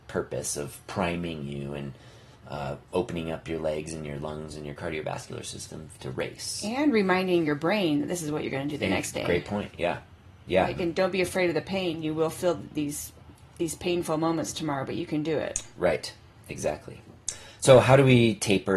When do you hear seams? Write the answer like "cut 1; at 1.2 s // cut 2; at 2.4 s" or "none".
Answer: none